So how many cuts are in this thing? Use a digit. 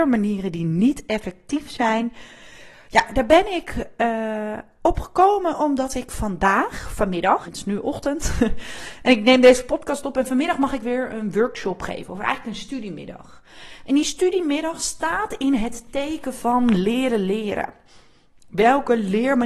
1